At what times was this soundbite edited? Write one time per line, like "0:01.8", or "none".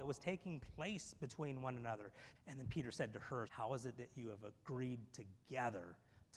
0:02.4
0:03.5

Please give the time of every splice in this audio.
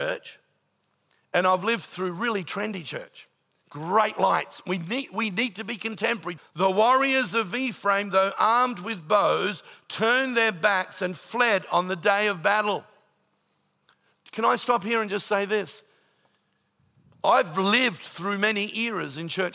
0:03.6
0:06.4

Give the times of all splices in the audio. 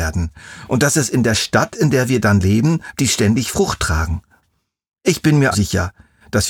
0:02.9
0:05.5

